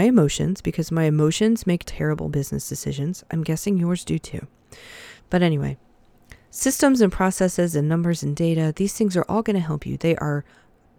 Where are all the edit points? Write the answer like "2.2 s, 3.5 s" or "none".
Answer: 1.8 s, 5.2 s